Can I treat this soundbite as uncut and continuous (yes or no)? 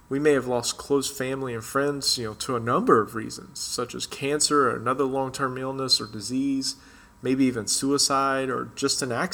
yes